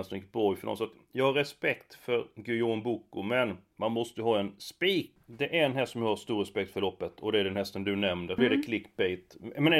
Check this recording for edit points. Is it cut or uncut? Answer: cut